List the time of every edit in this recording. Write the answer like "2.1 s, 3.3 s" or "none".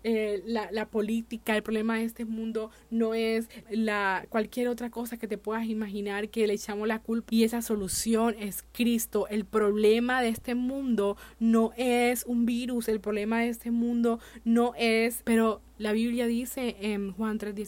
3.6 s, 7.3 s, 15.2 s